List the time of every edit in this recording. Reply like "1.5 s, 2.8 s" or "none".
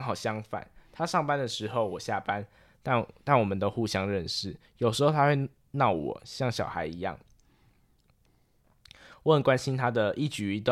none